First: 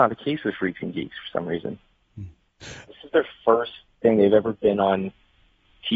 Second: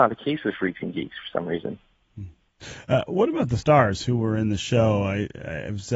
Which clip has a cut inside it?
first; 1 cut; at 2.9 s

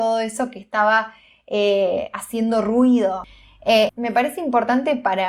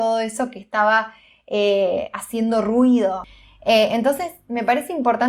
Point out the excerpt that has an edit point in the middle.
first; 1 cut; at 3.9 s

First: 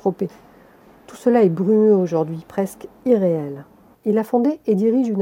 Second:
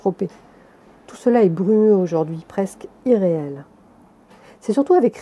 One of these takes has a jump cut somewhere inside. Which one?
first; 1 cut; at 3.9 s

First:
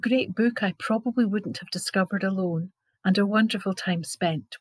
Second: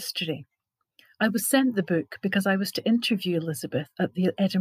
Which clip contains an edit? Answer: first; 1 cut; at 2.9 s

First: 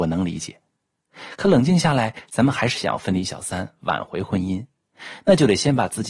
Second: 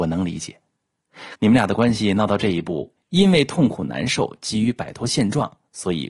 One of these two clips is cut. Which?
second; 2 cuts; at 1.4 s, 3.0 s

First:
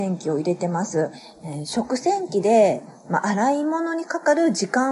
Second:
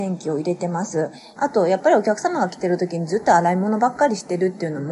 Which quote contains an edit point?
second; 1 cut; at 1.4 s

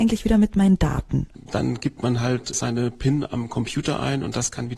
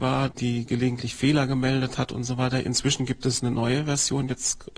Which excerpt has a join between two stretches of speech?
first; 1 cut; at 1.3 s

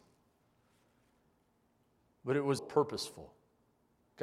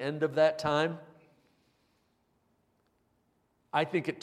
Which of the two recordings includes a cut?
first; 1 cut; at 2.6 s

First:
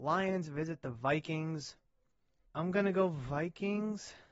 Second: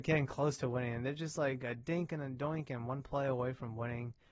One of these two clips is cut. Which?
first; 1 cut; at 2.4 s

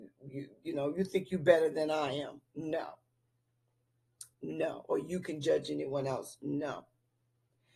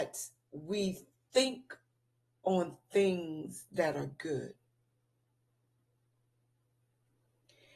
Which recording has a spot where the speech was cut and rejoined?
first; 1 cut; at 4.3 s

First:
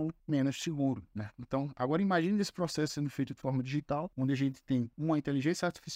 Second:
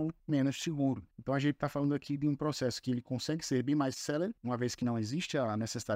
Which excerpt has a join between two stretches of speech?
second; 1 cut; at 1.1 s

